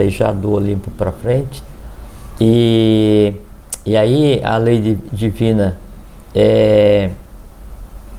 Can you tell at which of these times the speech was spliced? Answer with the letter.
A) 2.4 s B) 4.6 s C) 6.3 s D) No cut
A